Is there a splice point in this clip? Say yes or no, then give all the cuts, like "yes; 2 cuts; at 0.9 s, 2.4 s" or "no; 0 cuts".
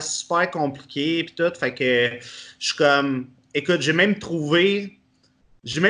no; 0 cuts